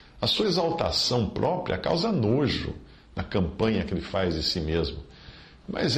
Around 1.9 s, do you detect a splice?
no; 0 cuts

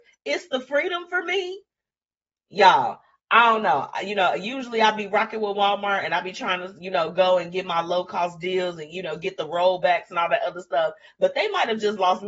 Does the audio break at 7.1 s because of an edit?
no; 0 cuts

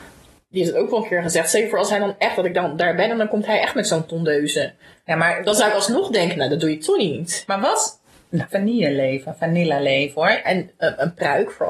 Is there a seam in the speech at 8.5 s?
yes; 2 cuts; at 8.5 s, 10.4 s

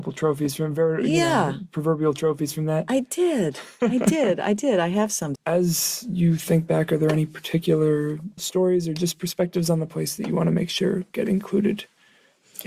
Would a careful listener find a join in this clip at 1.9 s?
no; 2 cuts; at 5.4 s, 8.4 s

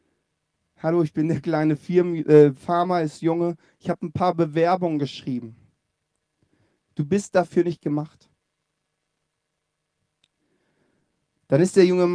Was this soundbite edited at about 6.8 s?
yes; 1 cut; at 6.8 s

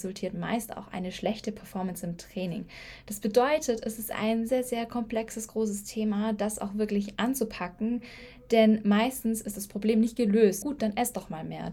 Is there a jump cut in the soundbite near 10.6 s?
yes; 2 cuts; at 4.5 s, 10.6 s

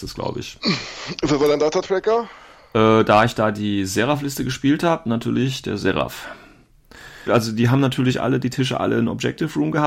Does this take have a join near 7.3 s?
yes; 1 cut; at 7.3 s

